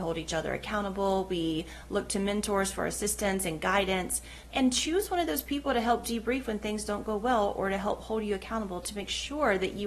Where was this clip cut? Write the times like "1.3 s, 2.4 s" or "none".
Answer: 4.5 s